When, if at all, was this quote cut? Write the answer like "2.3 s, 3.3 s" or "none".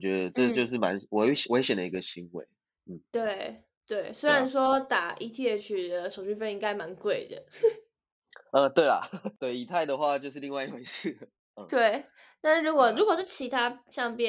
none